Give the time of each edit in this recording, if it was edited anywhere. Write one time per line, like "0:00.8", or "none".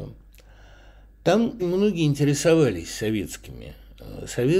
0:01.6